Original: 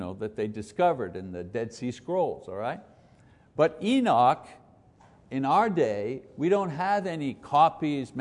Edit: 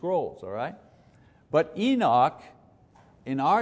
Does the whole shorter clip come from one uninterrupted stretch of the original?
yes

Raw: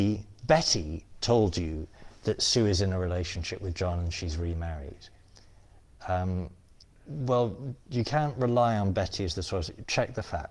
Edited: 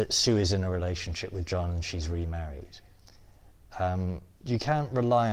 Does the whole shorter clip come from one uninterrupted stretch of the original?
no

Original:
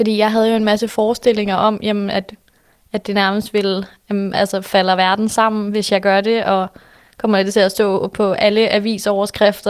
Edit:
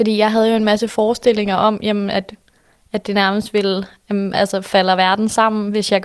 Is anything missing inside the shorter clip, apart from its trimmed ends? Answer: no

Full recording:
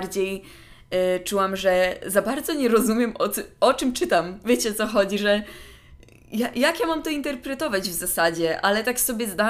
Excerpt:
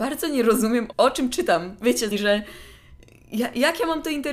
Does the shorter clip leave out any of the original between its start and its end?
yes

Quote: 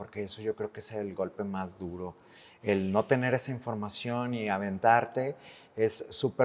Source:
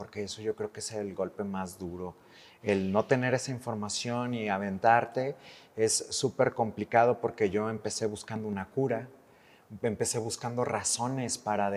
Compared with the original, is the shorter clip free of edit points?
yes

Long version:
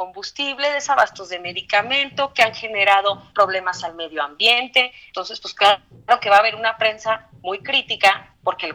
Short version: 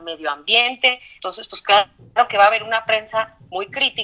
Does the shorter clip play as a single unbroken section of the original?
yes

